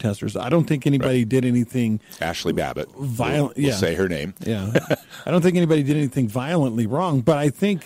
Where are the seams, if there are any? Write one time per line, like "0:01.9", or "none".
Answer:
none